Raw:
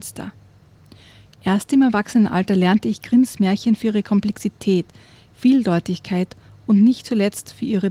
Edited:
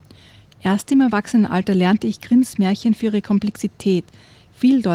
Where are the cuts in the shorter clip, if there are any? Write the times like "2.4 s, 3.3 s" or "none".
none